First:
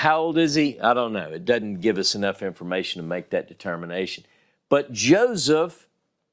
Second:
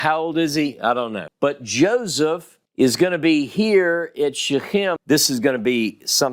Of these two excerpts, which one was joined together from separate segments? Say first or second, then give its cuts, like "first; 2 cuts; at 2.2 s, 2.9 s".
second; 3 cuts; at 1.3 s, 2.7 s, 5.0 s